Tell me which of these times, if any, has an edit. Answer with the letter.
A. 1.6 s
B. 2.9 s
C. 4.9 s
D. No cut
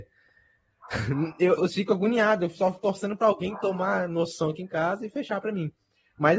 A